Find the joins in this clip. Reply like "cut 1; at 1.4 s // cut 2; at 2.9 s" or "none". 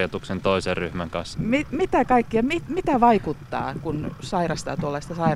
cut 1; at 1.3 s

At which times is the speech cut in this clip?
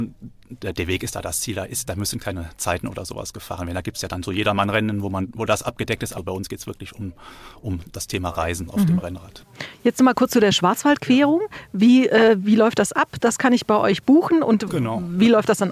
none

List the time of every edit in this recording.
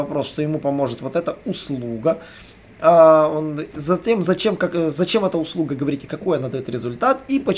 none

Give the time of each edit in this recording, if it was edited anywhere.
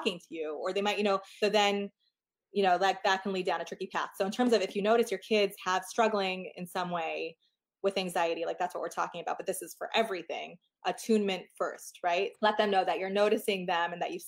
cut 1; at 1.4 s // cut 2; at 12.3 s

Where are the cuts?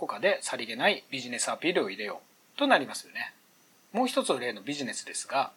none

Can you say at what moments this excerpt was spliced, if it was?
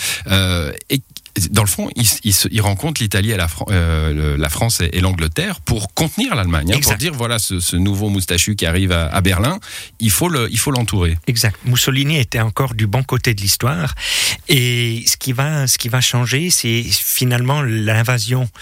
none

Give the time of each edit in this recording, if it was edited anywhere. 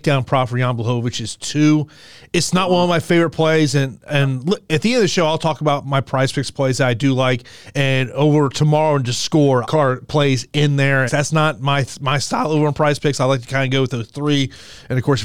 cut 1; at 9.6 s // cut 2; at 11.1 s

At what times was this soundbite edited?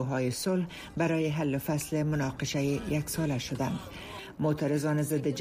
none

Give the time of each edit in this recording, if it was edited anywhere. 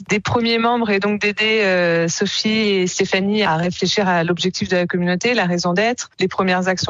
none

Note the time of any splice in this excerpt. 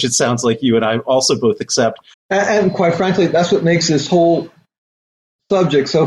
cut 1; at 2.1 s

